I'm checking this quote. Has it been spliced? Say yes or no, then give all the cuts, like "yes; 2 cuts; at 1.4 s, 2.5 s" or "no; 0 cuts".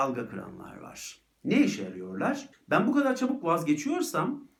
yes; 1 cut; at 2.5 s